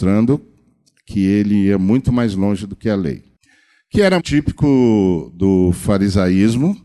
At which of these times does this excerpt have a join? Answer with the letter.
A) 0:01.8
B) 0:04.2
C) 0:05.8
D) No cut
B